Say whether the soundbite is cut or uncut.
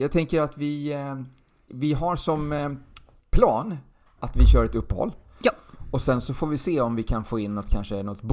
cut